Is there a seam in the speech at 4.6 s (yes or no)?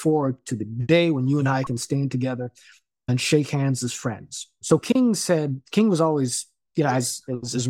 yes